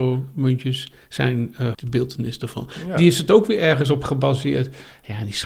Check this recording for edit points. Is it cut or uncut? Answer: cut